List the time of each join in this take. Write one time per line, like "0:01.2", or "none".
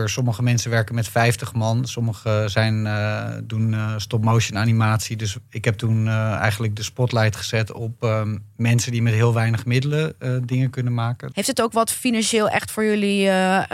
0:11.3

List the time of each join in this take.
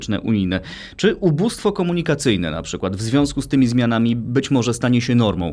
none

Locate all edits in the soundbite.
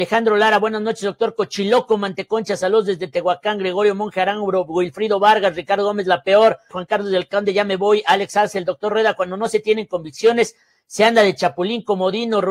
0:06.7

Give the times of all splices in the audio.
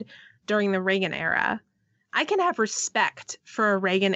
none

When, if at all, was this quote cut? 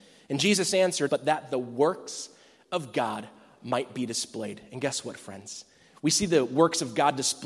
0:01.1

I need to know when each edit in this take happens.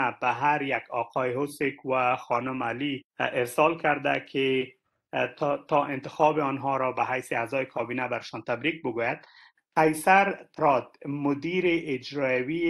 0:03.1

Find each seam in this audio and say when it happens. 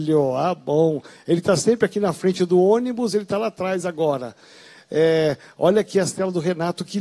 none

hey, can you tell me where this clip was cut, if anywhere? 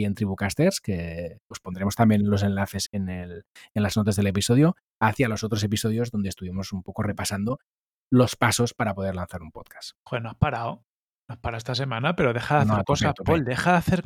0:02.9

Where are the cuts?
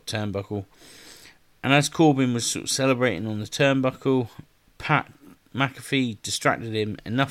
none

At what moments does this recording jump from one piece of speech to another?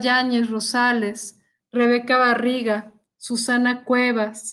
0:01.6

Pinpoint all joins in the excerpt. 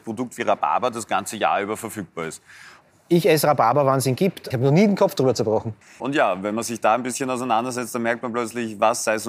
0:04.5
0:06.0

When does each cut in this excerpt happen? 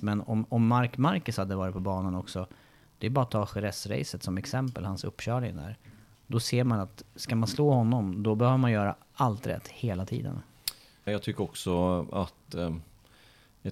0:11.1

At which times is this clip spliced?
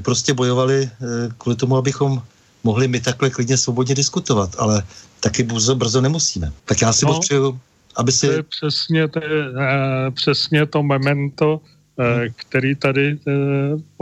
0:06.6

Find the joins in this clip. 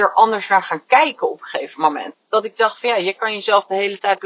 0:02.1

